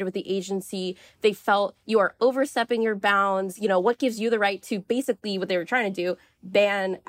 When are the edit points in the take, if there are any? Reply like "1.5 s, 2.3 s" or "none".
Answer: none